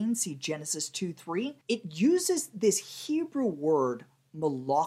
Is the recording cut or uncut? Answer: cut